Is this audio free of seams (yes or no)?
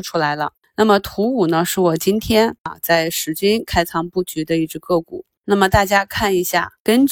yes